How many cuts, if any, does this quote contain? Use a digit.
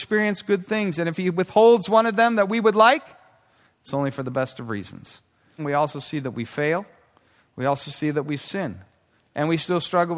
1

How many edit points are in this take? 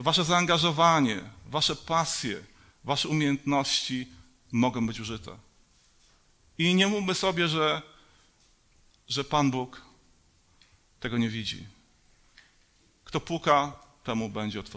0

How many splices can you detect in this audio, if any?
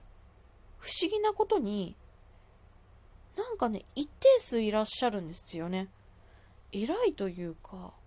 1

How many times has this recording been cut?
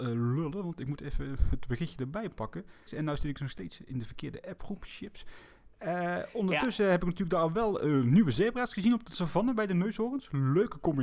1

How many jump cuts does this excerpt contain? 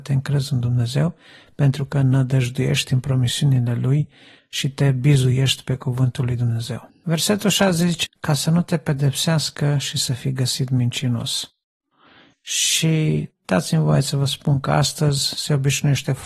1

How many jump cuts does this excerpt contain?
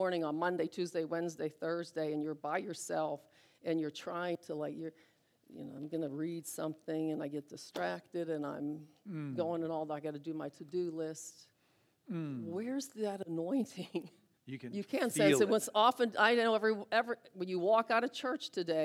1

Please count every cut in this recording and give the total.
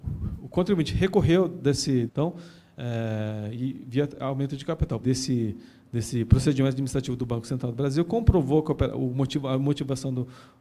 2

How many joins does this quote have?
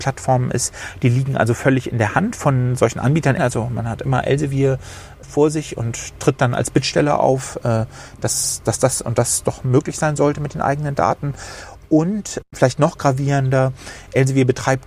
1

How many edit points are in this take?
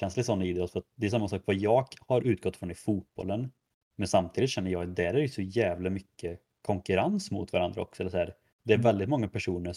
1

